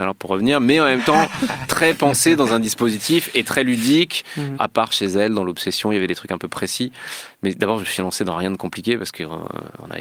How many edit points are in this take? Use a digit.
1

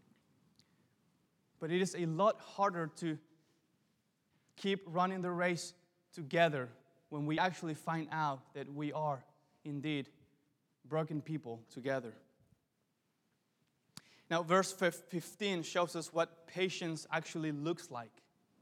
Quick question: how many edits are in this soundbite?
0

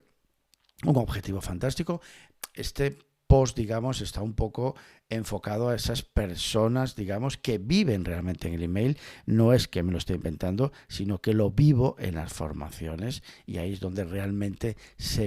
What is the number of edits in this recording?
0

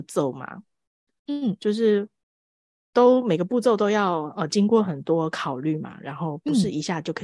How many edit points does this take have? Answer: 0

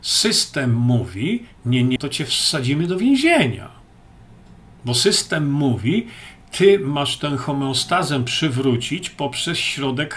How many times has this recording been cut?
1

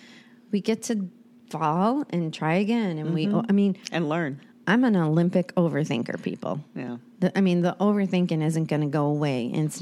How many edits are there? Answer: 0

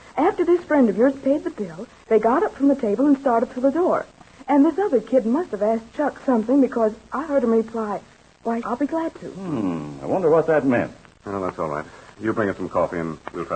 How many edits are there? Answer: 2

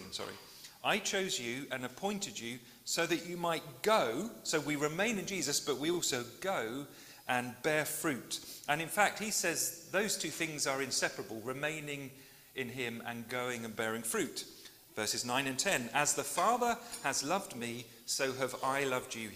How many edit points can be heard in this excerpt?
0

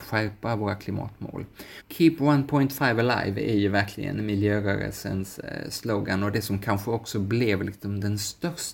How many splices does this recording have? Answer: 1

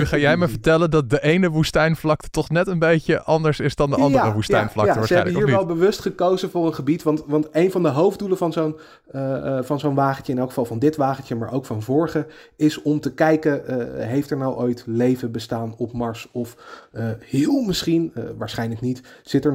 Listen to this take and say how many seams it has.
0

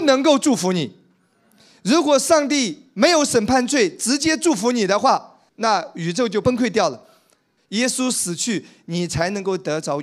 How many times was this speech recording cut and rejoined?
2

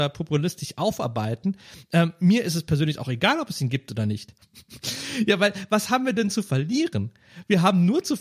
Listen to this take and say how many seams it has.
1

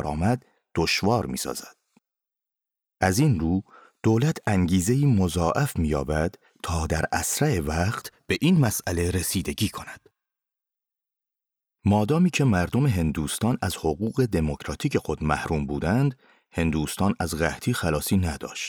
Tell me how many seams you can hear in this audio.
0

